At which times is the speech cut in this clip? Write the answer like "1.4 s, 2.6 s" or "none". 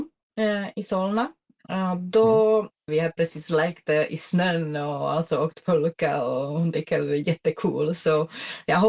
2.9 s